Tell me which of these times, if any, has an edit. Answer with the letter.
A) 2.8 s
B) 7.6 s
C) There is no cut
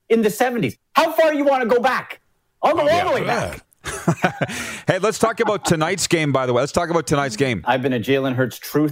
B